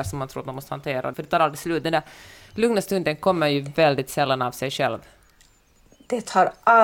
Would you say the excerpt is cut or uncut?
cut